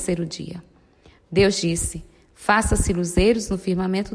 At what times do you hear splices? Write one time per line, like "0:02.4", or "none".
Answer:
none